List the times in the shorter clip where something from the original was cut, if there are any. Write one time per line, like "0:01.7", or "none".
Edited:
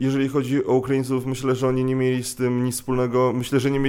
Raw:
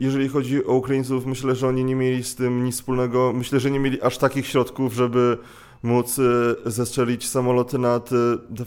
none